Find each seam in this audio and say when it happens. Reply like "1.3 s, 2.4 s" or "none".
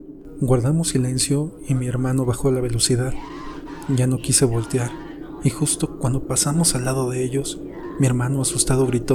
none

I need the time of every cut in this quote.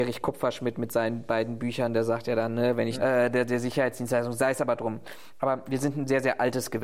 3.0 s

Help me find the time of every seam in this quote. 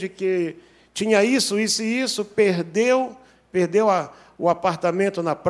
none

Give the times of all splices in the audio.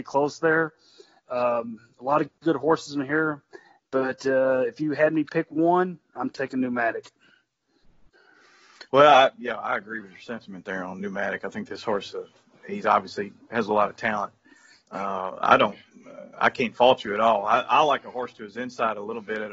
none

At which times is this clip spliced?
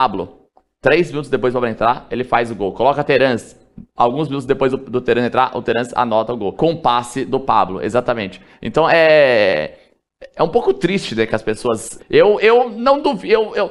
6.6 s, 12.0 s

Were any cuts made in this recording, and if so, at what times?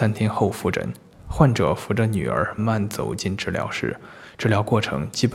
2.6 s

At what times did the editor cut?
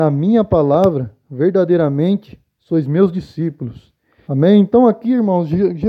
4.2 s

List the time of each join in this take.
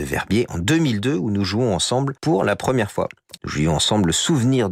2.2 s, 3.4 s

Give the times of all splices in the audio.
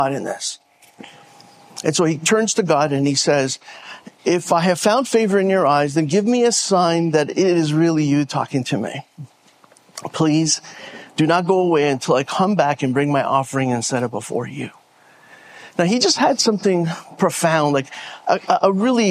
none

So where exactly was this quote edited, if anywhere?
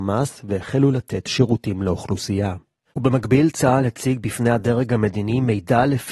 2.9 s

